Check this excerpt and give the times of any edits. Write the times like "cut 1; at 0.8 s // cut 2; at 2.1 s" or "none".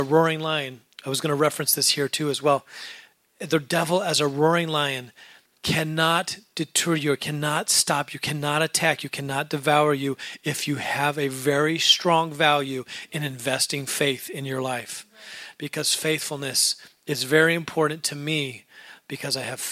none